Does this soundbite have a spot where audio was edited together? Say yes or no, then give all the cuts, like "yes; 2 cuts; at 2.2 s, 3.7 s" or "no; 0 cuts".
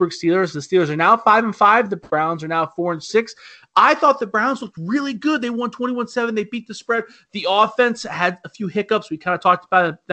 no; 0 cuts